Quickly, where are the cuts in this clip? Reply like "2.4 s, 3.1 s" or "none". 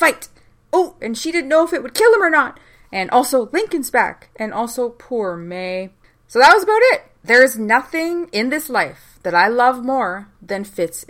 1.0 s